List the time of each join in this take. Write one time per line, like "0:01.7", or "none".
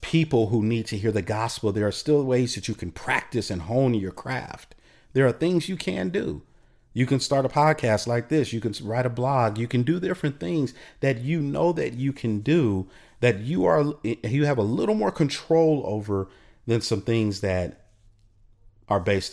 none